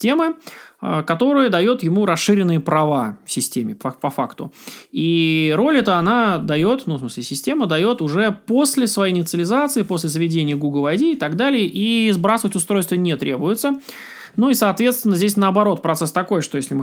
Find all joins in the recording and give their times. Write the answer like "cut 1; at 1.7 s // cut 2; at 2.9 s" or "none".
none